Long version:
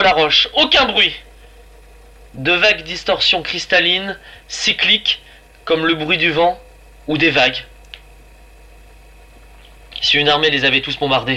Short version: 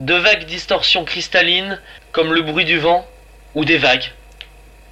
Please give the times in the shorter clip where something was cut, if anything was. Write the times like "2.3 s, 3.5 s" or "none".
2.0 s